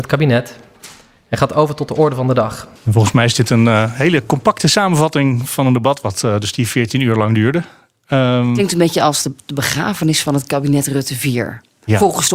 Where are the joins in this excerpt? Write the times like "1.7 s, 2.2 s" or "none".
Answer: 2.8 s